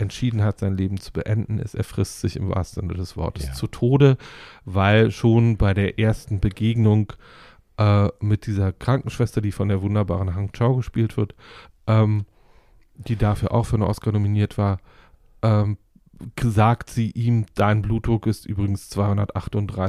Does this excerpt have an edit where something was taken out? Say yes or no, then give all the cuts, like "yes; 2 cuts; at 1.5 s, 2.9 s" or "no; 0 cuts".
no; 0 cuts